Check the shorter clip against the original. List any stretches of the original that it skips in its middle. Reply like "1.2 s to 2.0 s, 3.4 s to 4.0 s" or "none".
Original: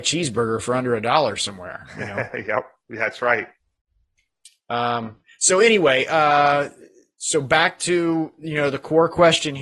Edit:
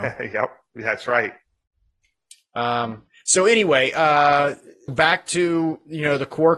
7.0 s to 7.4 s